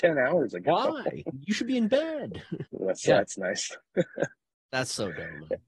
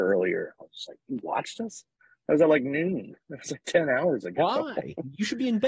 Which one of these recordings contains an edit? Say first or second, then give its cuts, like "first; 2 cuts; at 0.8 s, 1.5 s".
first; 1 cut; at 2.7 s